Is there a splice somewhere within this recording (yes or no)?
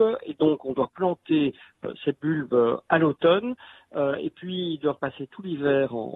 no